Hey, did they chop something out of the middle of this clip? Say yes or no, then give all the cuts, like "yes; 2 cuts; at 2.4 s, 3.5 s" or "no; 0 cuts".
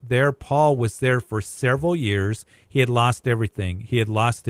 no; 0 cuts